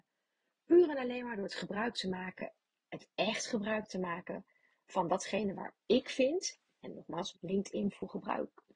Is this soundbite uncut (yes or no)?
no